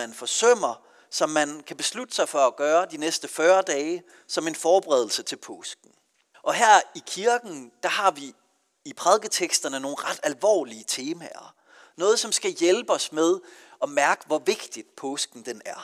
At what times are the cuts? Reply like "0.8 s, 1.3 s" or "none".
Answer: 6.3 s